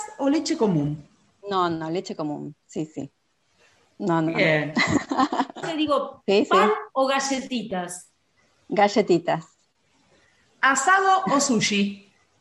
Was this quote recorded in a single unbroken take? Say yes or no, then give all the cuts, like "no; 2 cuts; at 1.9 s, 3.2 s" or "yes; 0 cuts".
no; 1 cut; at 5.6 s